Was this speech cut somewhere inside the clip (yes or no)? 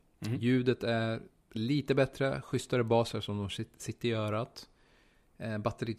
no